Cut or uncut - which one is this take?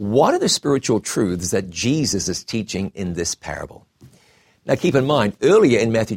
uncut